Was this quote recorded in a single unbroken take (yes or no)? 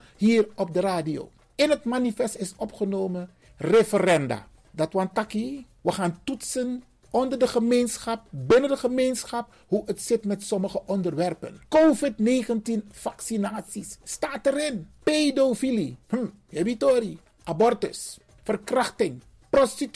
no